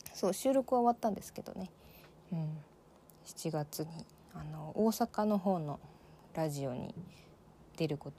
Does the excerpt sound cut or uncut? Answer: uncut